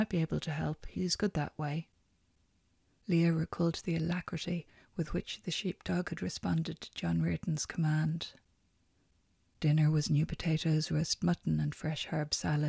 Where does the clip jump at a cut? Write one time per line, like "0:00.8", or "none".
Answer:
none